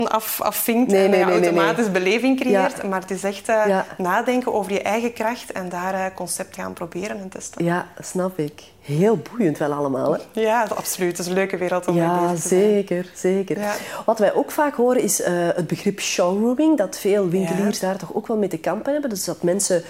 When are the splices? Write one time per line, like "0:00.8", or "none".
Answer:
0:06.6